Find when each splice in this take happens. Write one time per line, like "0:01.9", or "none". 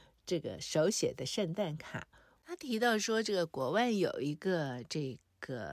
0:02.4